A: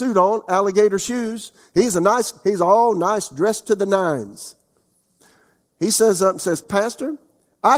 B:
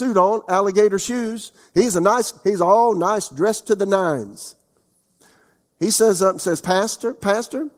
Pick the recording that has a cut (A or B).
A